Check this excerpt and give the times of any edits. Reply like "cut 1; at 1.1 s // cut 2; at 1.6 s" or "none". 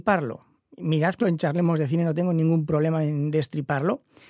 cut 1; at 1.2 s